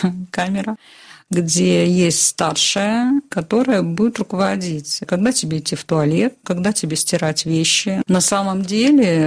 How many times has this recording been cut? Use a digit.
2